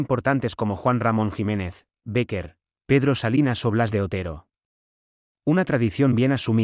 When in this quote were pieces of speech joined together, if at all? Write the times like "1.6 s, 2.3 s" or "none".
none